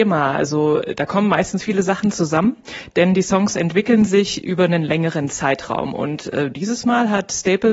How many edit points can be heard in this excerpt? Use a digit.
0